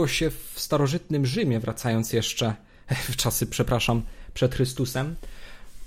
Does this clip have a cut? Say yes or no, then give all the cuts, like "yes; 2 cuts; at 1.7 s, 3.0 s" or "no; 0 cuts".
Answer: no; 0 cuts